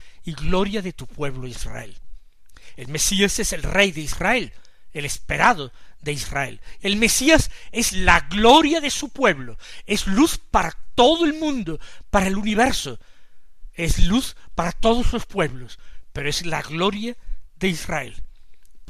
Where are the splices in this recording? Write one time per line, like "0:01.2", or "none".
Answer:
0:02.8
0:06.8